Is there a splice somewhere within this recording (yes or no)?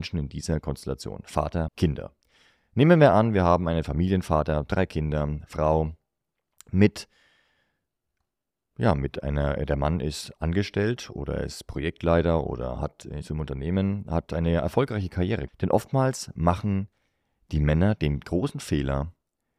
yes